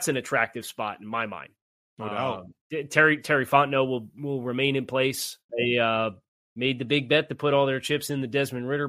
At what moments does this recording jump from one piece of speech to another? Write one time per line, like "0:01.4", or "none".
0:05.5